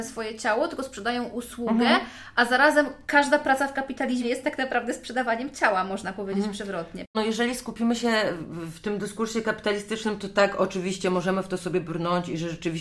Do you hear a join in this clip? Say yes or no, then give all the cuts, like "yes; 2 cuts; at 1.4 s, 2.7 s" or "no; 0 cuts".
no; 0 cuts